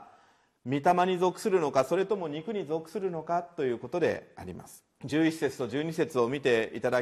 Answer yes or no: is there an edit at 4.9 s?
yes